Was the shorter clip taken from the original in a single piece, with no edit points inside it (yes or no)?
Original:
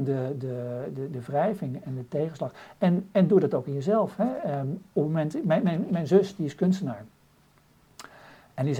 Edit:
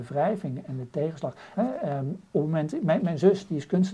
no